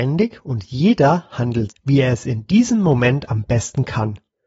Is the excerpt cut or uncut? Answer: cut